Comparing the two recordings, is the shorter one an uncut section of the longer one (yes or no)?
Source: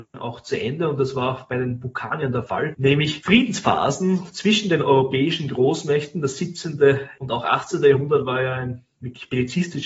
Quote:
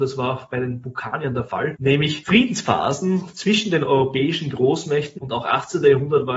no